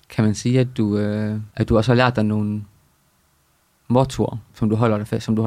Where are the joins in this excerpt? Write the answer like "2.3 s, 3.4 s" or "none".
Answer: 4.5 s